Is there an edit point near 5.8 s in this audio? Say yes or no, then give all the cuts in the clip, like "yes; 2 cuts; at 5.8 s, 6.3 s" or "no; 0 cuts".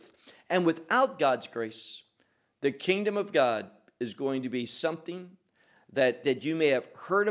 no; 0 cuts